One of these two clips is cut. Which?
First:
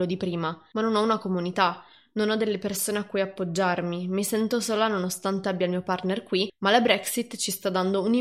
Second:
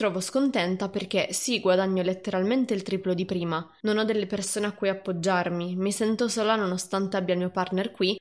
second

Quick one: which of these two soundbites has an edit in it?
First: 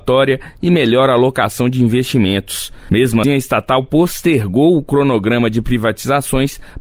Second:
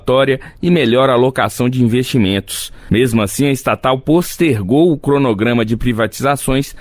first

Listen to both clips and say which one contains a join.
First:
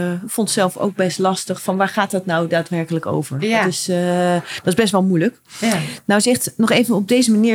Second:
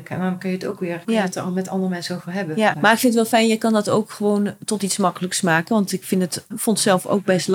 second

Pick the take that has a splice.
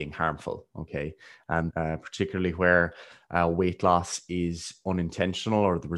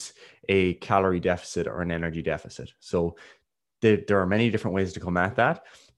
first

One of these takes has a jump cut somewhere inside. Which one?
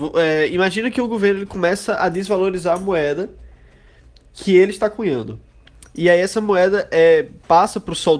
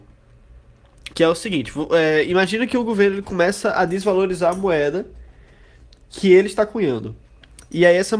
second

